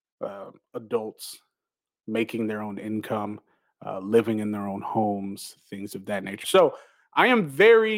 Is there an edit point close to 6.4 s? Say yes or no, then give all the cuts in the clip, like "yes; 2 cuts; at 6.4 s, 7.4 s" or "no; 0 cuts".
yes; 1 cut; at 6.4 s